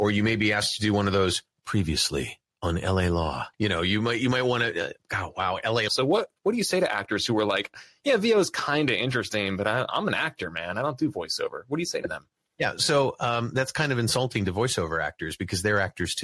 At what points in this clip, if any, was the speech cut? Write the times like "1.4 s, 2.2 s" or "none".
3.5 s, 5.9 s

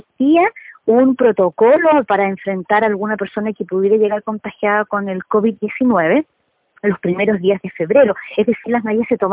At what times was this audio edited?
none

